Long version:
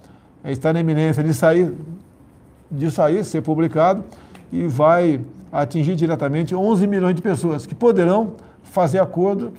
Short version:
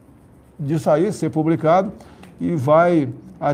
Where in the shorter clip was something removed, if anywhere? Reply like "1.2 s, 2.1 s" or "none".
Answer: none